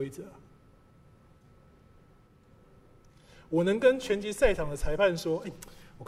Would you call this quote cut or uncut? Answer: uncut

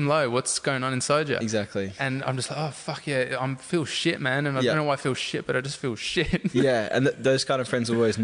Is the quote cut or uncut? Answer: uncut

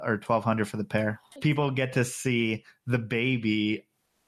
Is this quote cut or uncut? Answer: cut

